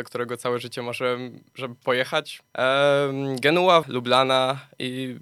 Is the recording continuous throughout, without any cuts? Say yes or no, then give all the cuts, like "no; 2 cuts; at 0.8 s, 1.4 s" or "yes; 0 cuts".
no; 2 cuts; at 2.4 s, 3.8 s